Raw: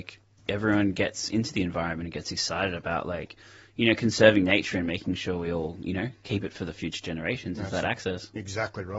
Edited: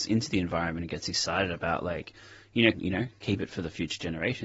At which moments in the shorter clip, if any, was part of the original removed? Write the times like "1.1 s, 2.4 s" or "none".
2.7 s